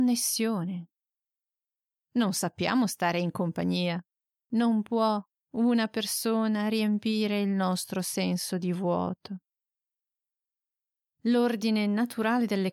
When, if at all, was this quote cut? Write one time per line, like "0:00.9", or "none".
0:02.0
0:04.4